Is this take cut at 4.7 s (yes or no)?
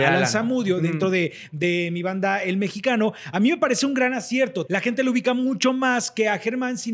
yes